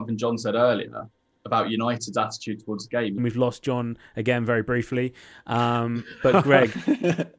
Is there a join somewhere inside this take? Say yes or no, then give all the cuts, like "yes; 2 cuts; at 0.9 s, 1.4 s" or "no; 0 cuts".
yes; 1 cut; at 3.2 s